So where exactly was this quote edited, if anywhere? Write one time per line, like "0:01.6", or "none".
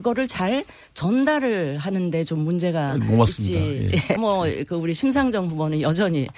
0:04.2